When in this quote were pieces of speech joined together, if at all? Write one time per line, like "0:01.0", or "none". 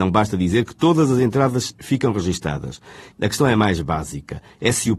0:03.1